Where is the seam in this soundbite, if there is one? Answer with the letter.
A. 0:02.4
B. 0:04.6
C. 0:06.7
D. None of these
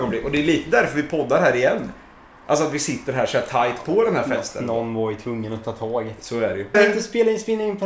C